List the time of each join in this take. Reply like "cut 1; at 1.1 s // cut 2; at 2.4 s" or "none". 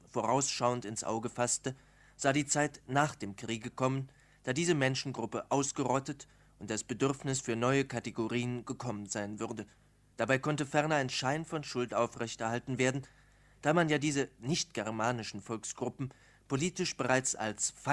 cut 1; at 10.1 s